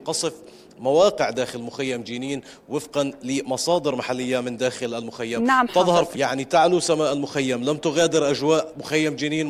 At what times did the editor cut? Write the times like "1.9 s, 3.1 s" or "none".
6.1 s